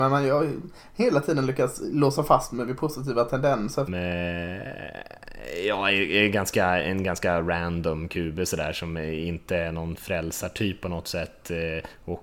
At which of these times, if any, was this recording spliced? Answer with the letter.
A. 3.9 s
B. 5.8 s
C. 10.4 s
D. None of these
A